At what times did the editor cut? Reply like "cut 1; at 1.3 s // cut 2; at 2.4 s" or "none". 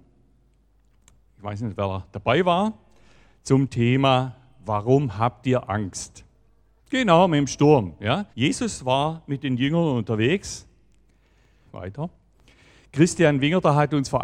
cut 1; at 6.8 s // cut 2; at 8.3 s // cut 3; at 11.7 s